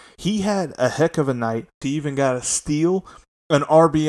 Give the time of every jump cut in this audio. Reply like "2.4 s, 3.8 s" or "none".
1.8 s